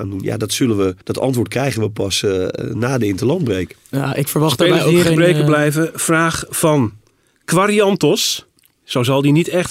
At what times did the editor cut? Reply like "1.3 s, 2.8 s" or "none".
1.0 s